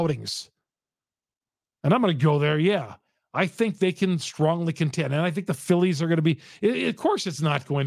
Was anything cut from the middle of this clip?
yes; 1 cut; at 1.7 s

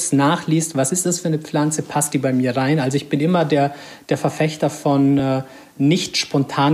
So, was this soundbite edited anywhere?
no; 0 cuts

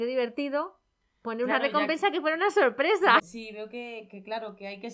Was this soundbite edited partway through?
yes; 1 cut; at 3.2 s

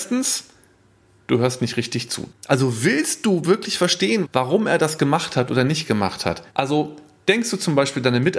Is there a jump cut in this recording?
yes; 3 cuts; at 2.3 s, 4.2 s, 6.5 s

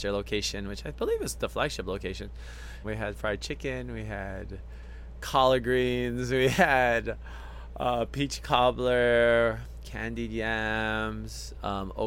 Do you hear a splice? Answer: yes; 1 cut; at 2.8 s

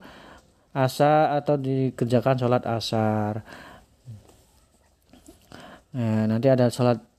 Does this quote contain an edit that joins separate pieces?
no; 0 cuts

